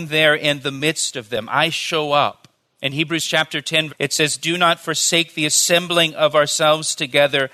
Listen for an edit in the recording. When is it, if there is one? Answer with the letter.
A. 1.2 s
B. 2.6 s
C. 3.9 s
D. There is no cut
C